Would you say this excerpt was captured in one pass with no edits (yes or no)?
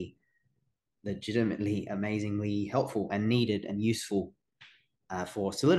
yes